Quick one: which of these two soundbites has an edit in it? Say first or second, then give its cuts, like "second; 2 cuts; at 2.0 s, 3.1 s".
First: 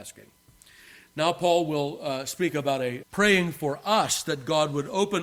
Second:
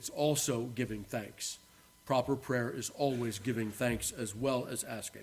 first; 1 cut; at 3.0 s